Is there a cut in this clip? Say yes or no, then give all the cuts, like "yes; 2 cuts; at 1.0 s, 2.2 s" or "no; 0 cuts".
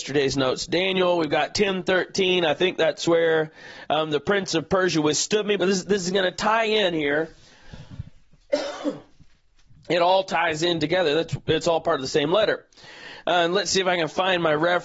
yes; 1 cut; at 5.6 s